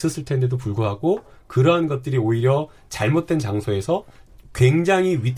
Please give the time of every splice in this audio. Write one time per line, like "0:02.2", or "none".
none

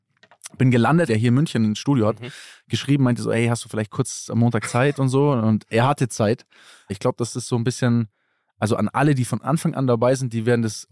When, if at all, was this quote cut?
0:01.1
0:06.9

